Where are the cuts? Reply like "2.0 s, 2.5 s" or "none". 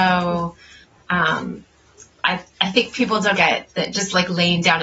3.3 s